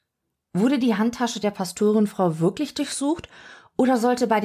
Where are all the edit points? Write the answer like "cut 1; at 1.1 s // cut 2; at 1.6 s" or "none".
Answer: none